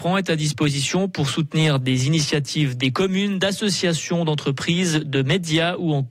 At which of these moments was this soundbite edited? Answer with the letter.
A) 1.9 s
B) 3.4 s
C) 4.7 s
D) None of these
D